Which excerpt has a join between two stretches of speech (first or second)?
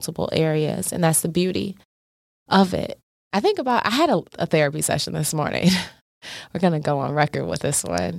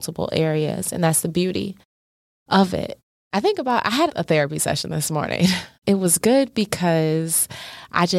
second